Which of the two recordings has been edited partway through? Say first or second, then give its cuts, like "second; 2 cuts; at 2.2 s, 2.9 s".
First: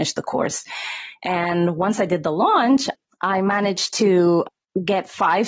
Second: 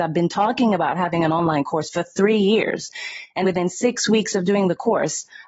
second; 1 cut; at 3.4 s